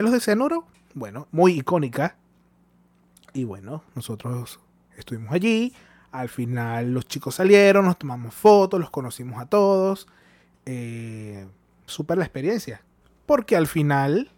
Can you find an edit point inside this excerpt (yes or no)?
yes